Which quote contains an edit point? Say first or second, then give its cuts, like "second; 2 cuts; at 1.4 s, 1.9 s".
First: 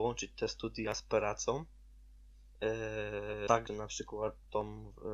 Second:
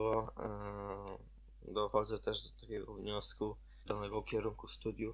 second; 1 cut; at 3.9 s